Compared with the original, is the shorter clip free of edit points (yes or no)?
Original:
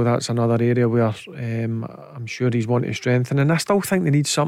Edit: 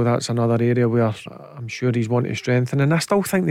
no